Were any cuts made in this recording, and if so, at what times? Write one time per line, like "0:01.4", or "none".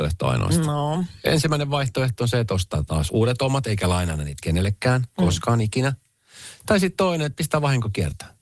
0:03.1